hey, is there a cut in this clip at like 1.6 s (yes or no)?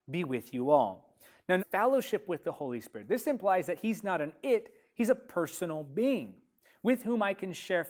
yes